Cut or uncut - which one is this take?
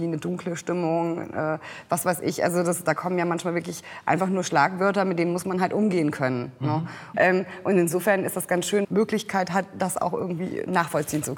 cut